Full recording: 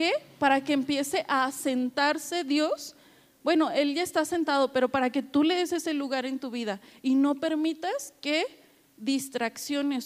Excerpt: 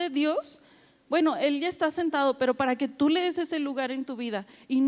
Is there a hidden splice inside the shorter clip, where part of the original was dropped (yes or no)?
no